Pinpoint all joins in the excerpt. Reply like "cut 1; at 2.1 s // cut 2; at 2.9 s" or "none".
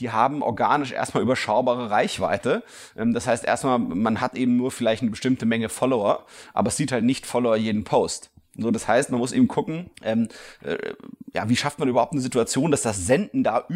cut 1; at 9.9 s